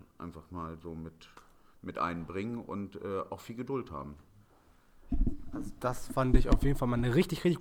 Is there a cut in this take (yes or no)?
no